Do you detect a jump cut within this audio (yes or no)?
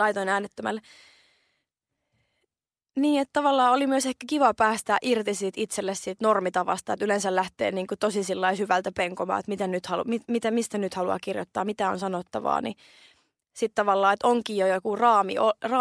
no